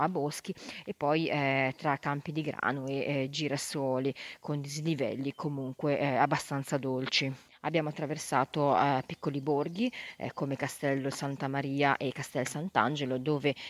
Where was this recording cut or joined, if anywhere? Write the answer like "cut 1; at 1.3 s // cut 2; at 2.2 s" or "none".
none